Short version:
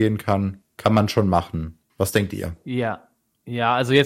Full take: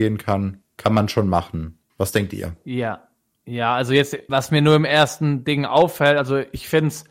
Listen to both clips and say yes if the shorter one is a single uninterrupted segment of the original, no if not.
yes